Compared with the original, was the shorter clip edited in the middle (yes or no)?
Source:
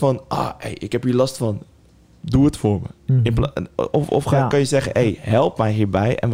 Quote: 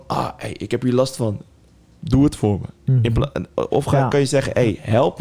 yes